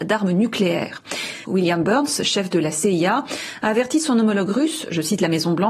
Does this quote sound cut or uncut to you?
cut